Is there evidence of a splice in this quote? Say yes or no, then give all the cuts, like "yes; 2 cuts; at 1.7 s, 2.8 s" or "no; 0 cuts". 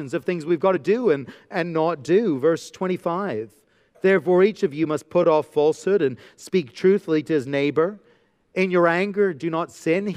no; 0 cuts